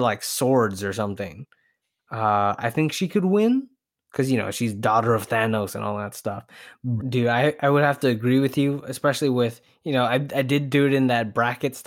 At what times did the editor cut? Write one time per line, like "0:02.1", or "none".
0:07.0